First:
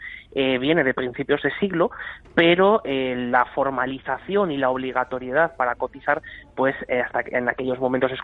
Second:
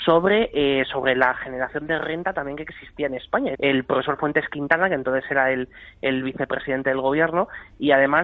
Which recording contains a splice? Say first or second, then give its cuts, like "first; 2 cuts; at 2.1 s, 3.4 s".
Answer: second; 1 cut; at 3.5 s